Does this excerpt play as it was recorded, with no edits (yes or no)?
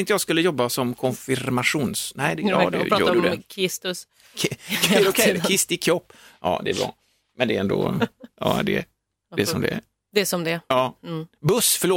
yes